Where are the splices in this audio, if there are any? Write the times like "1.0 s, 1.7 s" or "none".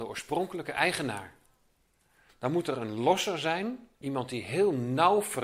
2.3 s, 3.9 s